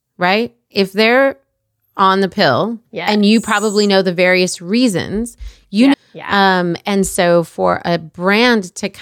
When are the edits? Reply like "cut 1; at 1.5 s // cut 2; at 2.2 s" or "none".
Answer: cut 1; at 2.9 s // cut 2; at 5.9 s